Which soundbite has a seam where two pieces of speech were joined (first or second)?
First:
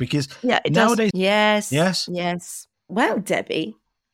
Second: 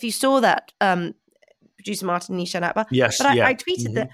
first